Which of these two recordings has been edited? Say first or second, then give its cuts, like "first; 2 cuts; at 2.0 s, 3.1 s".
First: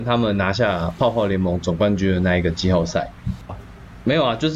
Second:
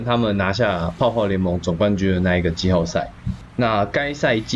first; 1 cut; at 3.5 s